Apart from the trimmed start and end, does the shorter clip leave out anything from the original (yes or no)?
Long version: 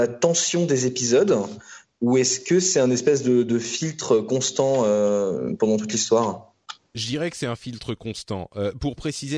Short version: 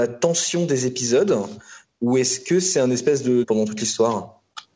yes